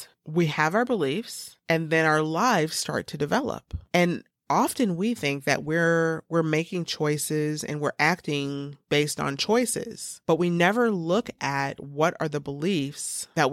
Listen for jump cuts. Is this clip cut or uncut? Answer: uncut